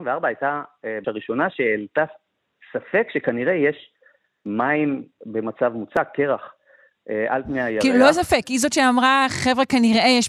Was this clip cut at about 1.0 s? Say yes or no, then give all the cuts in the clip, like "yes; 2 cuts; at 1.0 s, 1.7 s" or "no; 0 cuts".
yes; 1 cut; at 1.0 s